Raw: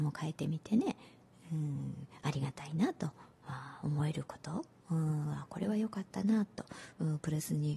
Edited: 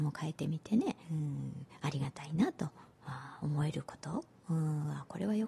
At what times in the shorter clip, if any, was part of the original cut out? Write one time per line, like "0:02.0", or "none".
0:01.0

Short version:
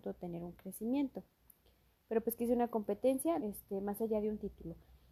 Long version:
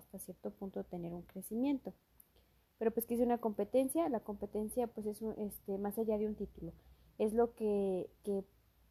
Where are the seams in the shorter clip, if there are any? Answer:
0:03.4

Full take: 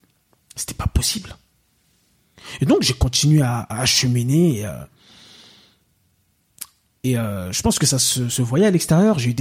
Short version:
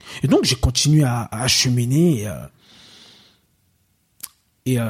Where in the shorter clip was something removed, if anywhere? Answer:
none

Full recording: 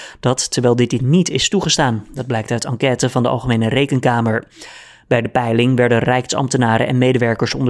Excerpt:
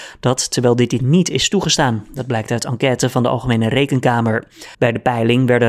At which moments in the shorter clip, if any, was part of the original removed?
0:04.7

